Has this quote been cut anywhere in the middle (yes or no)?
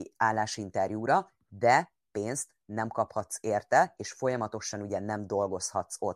no